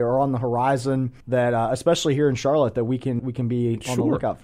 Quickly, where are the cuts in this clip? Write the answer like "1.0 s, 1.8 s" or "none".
1.2 s, 3.2 s